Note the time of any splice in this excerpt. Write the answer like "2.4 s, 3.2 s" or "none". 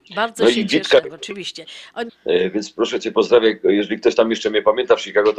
1.0 s, 2.1 s